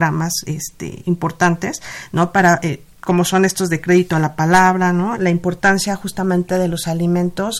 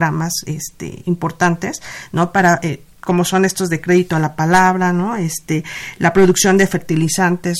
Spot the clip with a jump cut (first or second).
first